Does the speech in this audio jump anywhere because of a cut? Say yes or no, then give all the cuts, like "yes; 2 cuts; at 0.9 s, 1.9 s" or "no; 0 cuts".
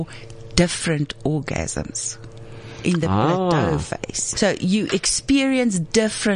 yes; 1 cut; at 4.3 s